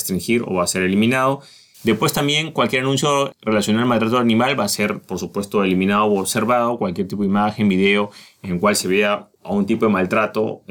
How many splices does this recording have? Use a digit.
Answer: 1